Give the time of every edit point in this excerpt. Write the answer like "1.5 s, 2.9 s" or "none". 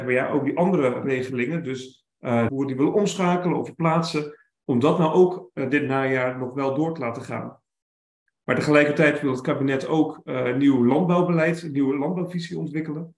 2.5 s